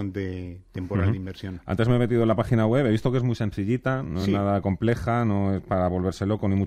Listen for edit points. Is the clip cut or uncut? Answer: uncut